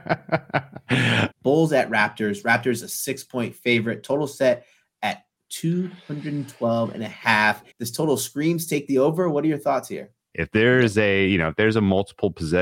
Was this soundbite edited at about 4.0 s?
no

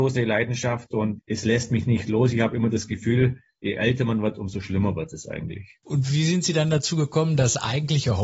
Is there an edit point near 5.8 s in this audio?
no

